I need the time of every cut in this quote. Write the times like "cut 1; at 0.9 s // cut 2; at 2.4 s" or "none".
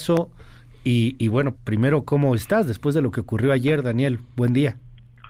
cut 1; at 1.5 s